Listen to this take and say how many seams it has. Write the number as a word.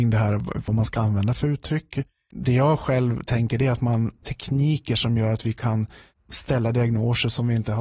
two